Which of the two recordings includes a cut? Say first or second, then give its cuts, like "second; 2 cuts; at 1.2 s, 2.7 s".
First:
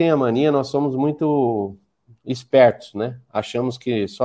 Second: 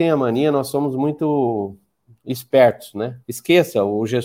second; 1 cut; at 3.2 s